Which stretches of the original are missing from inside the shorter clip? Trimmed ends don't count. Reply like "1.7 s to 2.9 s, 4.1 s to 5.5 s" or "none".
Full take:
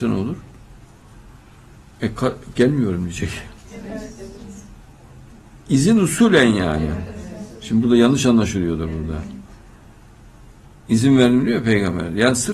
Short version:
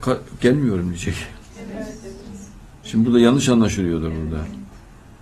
5.0 s to 7.6 s